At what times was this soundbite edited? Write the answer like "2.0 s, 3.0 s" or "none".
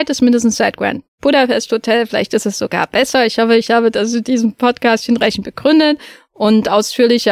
none